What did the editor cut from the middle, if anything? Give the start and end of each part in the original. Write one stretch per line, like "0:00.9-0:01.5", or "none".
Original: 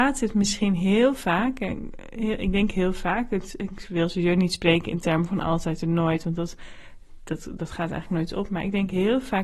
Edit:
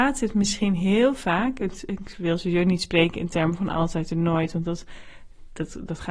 0:01.6-0:03.3